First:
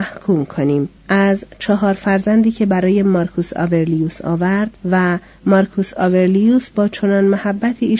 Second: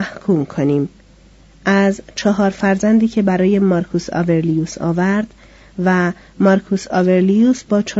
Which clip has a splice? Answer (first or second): first